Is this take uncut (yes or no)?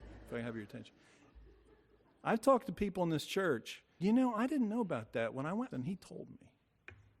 no